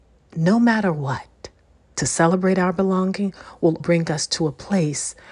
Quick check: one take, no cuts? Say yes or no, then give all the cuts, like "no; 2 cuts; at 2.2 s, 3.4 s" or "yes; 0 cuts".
no; 2 cuts; at 1.9 s, 3.8 s